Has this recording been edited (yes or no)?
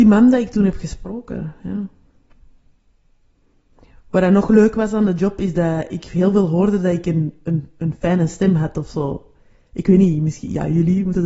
no